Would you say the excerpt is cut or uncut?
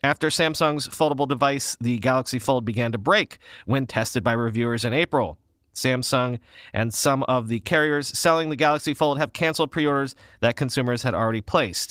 uncut